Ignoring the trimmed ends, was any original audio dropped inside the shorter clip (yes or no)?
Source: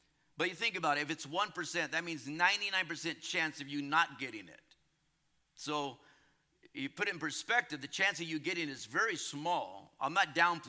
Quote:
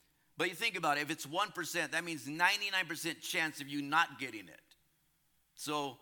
no